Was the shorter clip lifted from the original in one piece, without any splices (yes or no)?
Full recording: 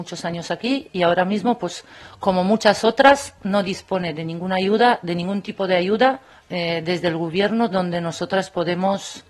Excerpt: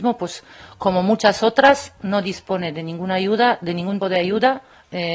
no